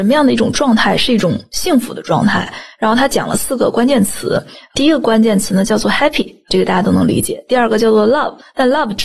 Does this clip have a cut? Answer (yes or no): no